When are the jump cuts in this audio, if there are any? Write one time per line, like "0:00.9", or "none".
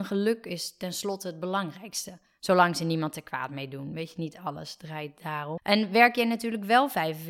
0:05.6